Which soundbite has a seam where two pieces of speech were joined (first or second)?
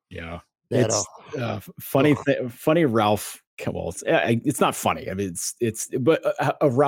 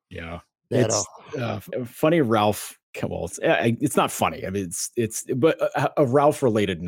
second